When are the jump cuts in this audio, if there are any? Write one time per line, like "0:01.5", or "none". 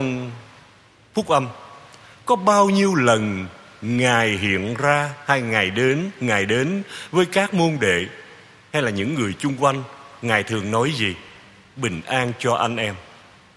none

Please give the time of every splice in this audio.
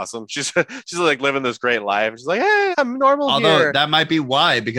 0:02.7

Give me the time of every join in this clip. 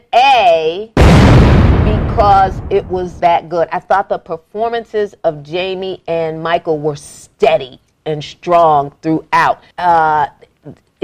0:03.2
0:09.7

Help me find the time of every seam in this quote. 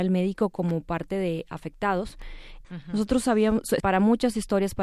0:02.6
0:03.8

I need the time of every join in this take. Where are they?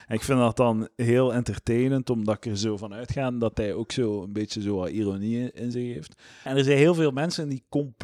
0:06.5

